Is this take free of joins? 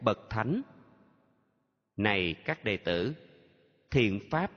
yes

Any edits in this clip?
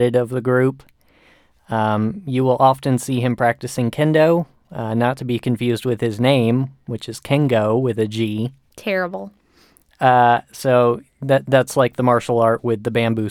no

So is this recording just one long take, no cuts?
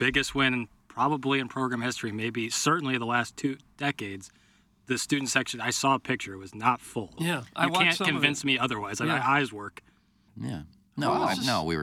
no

